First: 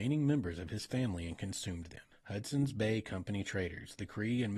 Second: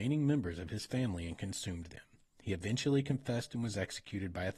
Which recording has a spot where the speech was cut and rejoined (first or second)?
first